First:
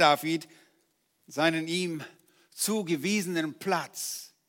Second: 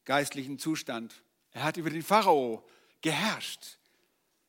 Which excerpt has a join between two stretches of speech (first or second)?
second